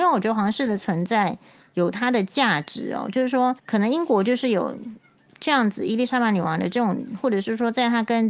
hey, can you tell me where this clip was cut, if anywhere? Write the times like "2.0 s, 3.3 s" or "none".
3.6 s